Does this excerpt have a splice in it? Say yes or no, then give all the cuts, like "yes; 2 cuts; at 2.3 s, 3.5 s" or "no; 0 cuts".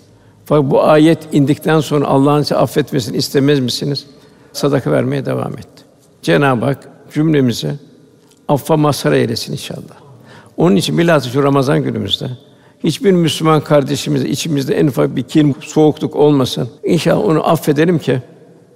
yes; 2 cuts; at 15.5 s, 16.8 s